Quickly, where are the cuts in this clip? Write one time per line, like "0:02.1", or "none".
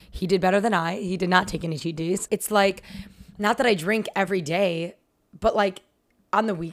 0:02.3